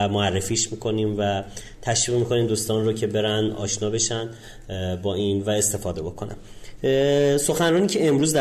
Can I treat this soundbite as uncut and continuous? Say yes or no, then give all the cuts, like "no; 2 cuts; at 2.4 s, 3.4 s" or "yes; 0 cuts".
yes; 0 cuts